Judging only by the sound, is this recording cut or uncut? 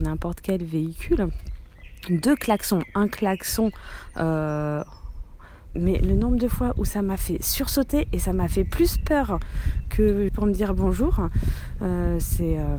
cut